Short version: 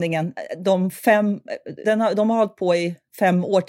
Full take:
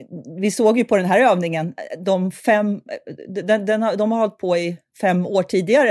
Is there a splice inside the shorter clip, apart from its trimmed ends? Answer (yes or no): yes